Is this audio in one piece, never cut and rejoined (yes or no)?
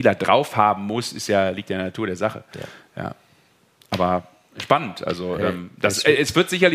yes